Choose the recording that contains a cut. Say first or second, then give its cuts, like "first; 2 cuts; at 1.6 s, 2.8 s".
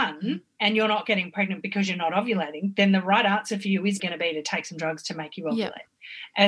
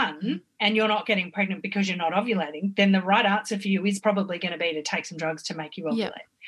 first; 1 cut; at 4.0 s